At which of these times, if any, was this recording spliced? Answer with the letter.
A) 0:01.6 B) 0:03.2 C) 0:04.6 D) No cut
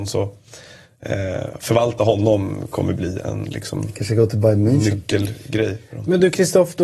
B